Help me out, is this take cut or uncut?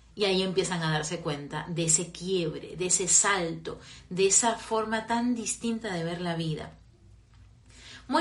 uncut